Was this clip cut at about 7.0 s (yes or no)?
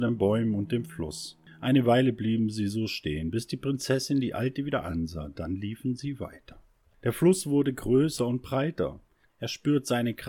no